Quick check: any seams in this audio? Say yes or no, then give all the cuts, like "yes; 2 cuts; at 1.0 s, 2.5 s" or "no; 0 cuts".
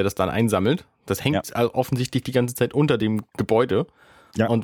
no; 0 cuts